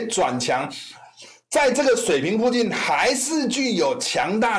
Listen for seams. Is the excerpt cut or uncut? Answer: uncut